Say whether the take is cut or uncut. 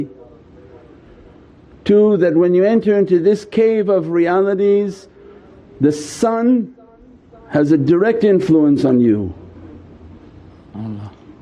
uncut